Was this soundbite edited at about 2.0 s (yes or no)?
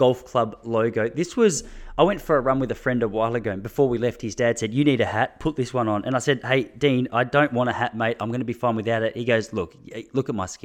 no